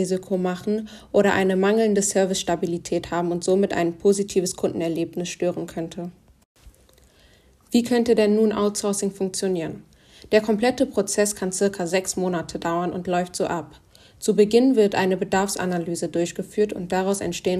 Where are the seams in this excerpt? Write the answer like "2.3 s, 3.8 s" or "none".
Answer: none